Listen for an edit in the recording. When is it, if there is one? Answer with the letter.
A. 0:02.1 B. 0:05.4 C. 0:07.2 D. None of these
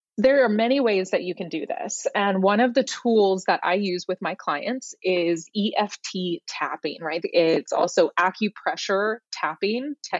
C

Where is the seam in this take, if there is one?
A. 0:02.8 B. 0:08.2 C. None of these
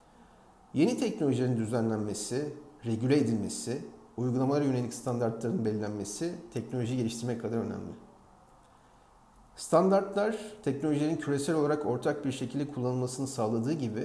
C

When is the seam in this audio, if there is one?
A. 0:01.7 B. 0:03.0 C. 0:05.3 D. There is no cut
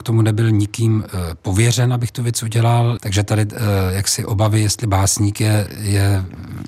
B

